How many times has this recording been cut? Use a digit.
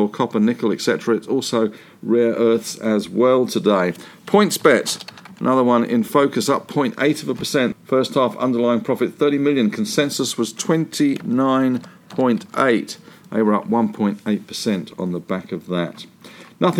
1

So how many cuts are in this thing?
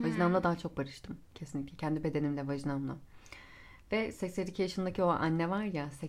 0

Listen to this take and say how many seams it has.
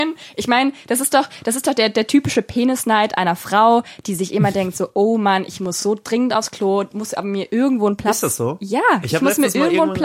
0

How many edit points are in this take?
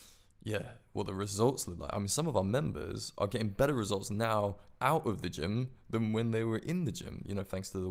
0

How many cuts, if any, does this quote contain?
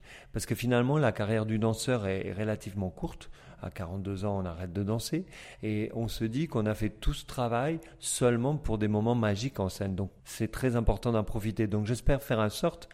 1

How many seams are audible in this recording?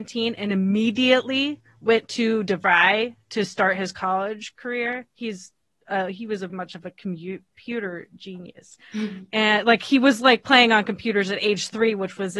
2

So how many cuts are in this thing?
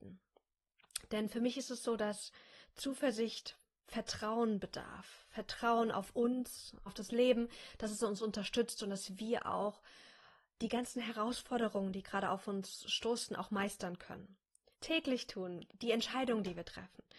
2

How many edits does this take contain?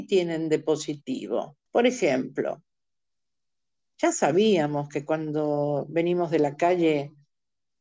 1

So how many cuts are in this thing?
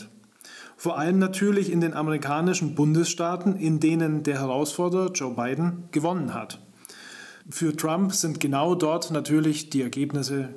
1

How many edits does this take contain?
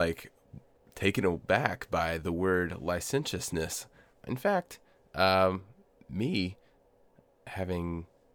1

